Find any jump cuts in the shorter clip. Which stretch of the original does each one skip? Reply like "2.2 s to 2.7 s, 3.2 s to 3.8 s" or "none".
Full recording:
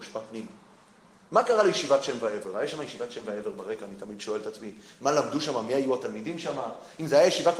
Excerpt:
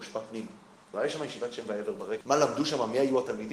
0.9 s to 2.5 s, 3.8 s to 5.0 s